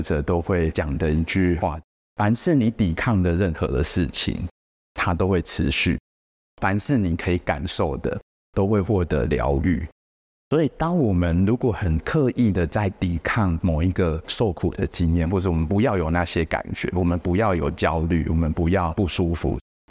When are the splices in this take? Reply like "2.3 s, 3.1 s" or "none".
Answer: none